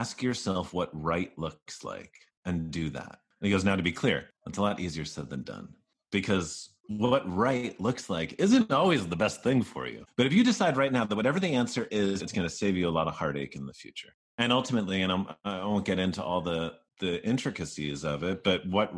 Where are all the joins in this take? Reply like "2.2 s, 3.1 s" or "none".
12.2 s